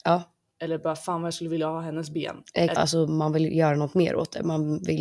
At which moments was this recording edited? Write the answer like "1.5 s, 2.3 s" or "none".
2.7 s